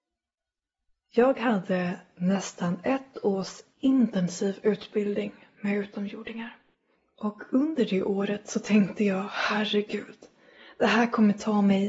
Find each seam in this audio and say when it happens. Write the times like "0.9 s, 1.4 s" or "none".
none